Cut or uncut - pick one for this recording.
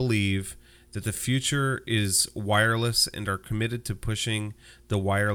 uncut